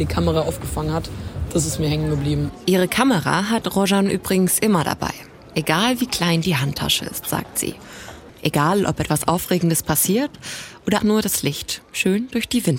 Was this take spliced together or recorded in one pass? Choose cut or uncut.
cut